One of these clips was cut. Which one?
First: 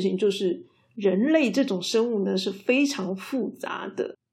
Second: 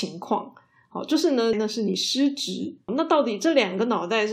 second; 2 cuts; at 1.5 s, 2.9 s

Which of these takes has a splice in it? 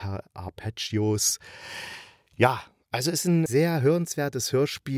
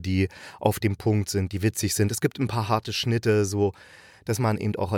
first; 1 cut; at 3.5 s

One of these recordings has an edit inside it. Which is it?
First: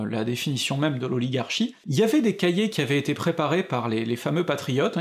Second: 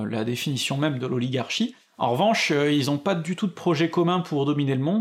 first; 1 cut; at 1.8 s

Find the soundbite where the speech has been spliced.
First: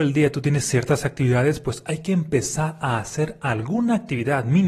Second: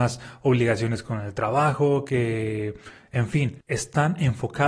second; 1 cut; at 3.6 s

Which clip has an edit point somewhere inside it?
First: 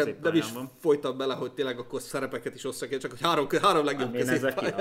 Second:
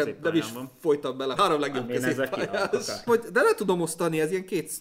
second; 2 cuts; at 1.4 s, 3.1 s

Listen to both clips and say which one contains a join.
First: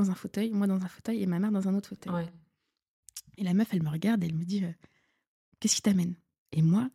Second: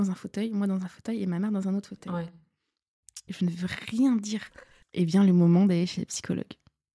second; 2 cuts; at 3.3 s, 4.8 s

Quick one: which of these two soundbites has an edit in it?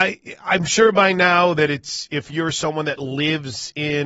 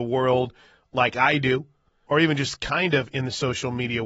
second; 1 cut; at 2.1 s

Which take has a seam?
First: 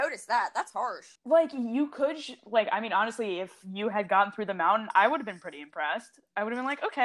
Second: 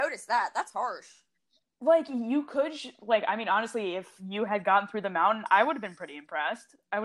first; 1 cut; at 1.2 s

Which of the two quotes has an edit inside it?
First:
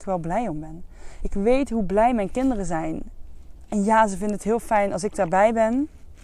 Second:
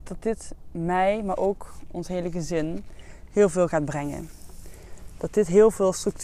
first; 2 cuts; at 1.2 s, 3.7 s

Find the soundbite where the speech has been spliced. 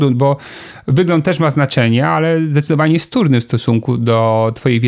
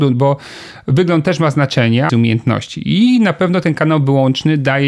second; 1 cut; at 2.1 s

